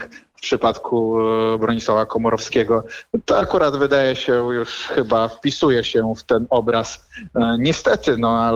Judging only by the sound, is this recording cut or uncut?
uncut